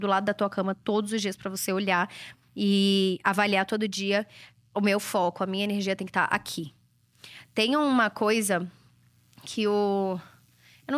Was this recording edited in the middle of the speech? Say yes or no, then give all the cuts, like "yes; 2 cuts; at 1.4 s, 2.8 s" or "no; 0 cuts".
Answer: no; 0 cuts